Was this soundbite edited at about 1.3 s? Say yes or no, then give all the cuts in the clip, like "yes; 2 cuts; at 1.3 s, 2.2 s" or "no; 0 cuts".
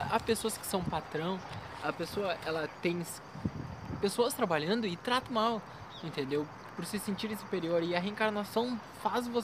no; 1 cut; at 5.3 s